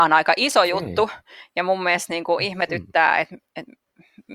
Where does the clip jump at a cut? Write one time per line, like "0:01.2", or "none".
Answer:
none